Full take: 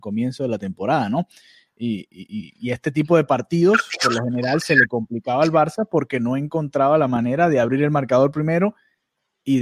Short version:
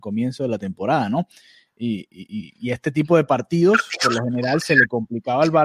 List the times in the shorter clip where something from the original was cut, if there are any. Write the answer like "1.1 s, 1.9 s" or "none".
none

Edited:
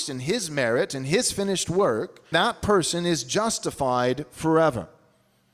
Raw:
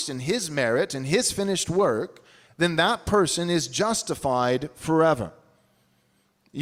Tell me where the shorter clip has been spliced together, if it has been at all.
2.3 s

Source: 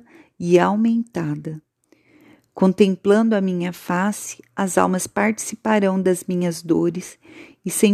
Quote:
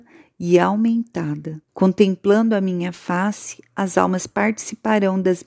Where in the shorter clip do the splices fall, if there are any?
1.7 s

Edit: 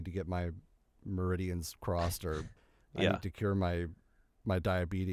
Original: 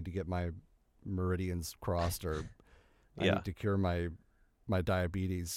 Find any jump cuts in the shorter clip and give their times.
2.6 s

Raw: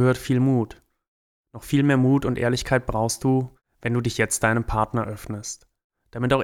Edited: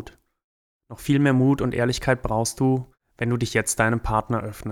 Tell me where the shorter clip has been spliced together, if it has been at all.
none

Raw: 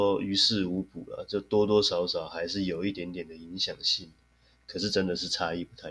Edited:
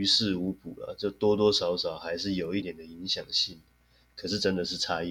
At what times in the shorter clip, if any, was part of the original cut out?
2.6 s

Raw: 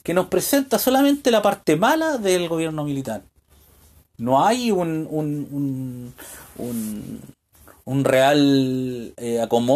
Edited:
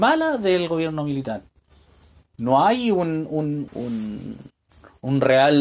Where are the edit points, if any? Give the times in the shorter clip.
3.7 s

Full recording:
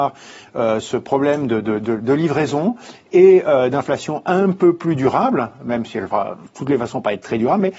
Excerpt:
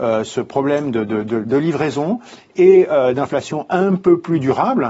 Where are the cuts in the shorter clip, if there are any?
none

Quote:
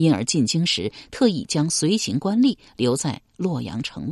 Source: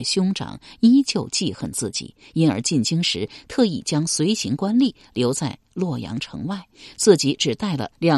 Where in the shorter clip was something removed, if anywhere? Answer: none

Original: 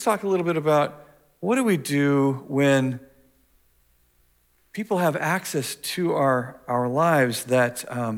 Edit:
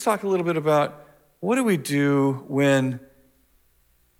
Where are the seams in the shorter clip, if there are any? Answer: none

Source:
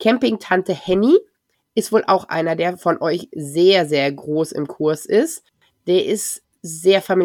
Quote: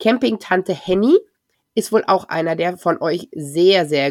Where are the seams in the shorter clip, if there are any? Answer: none

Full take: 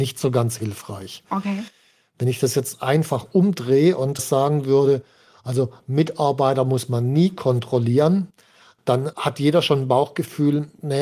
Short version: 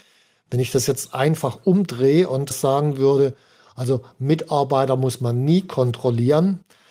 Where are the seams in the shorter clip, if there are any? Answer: none

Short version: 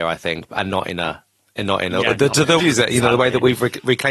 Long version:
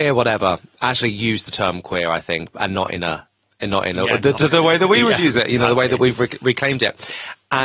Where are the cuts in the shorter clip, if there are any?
2.6 s

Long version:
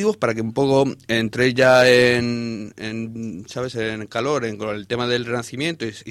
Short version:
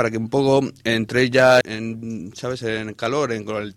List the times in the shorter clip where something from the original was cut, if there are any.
1.6 s

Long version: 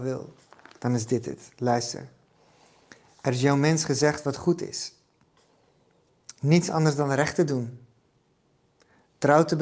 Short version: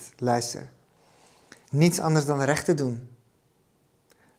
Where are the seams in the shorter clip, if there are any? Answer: 1.6 s

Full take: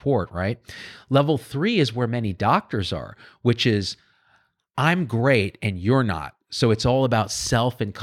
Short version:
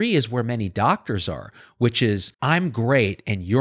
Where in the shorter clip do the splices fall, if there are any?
2.3 s

